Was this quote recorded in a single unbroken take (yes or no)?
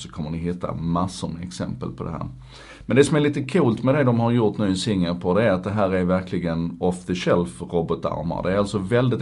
yes